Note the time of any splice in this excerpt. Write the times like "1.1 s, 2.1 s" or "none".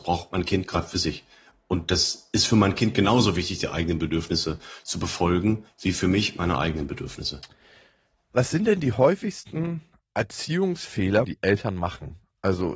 11.2 s